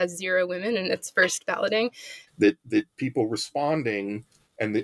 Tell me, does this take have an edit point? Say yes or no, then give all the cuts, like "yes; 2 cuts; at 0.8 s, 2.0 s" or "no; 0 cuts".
yes; 1 cut; at 2.3 s